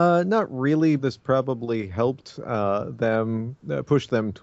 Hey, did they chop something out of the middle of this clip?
yes; 1 cut; at 1.0 s

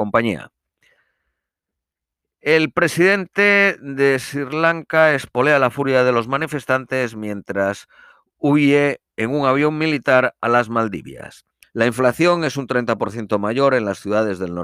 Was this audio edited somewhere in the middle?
yes; 1 cut; at 11.6 s

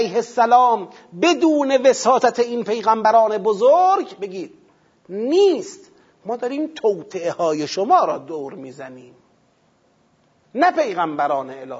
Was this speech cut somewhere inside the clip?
no; 0 cuts

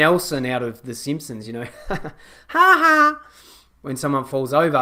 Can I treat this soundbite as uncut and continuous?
yes; 0 cuts

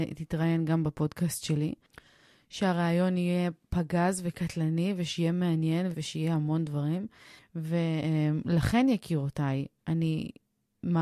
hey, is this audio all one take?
no; 2 cuts; at 5.9 s, 7.4 s

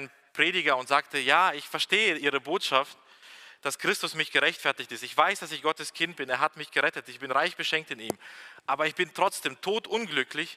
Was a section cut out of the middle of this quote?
no; 0 cuts

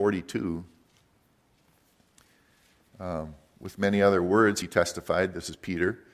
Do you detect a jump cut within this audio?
no; 0 cuts

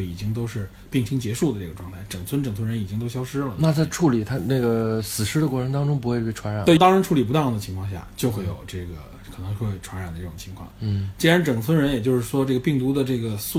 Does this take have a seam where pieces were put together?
yes; 2 cuts; at 6.8 s, 10.7 s

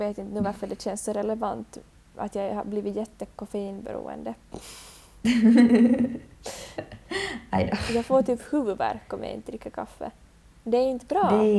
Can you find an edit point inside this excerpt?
no; 0 cuts

